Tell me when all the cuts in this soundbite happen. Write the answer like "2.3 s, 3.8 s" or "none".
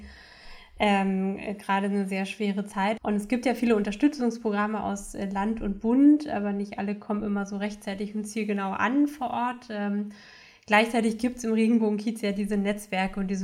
3.0 s